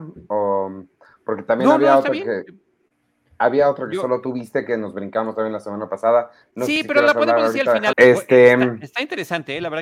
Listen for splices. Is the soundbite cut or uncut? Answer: cut